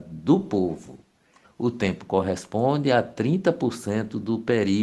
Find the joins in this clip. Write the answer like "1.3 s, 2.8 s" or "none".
1.4 s